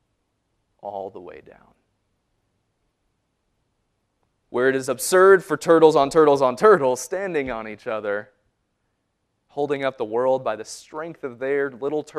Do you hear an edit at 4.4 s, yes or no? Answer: yes